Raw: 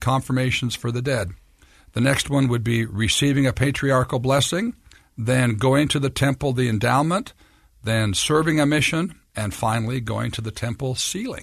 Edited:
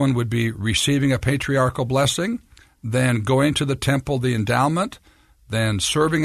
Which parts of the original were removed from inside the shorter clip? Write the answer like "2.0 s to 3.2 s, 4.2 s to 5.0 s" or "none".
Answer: none